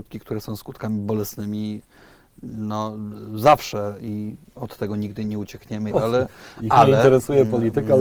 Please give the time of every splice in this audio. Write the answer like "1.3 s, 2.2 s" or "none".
5.9 s